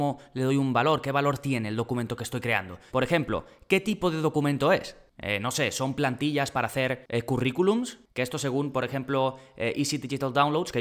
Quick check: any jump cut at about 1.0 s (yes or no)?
no